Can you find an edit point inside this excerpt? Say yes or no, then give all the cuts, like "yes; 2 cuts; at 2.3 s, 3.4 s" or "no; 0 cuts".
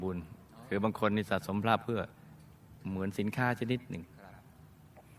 no; 0 cuts